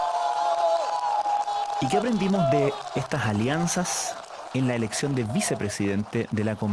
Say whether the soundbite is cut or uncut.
uncut